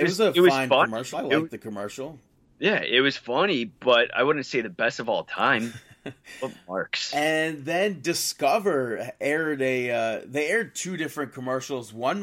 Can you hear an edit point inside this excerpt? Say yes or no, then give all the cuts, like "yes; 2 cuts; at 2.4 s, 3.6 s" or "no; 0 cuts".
no; 0 cuts